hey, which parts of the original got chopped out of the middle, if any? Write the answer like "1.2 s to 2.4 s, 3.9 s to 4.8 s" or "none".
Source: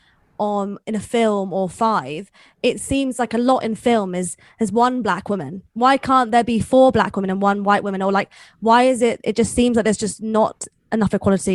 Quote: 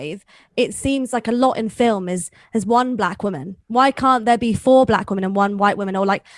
none